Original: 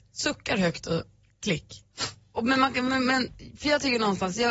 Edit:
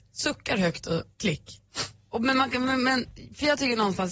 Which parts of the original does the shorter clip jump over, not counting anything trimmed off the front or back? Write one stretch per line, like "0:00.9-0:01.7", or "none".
0:01.1-0:01.3